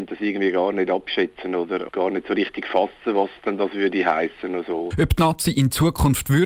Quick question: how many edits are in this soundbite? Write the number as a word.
one